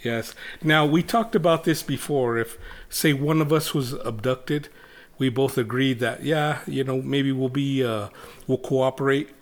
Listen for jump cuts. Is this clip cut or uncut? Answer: uncut